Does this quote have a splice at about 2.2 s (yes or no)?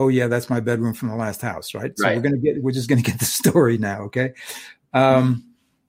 no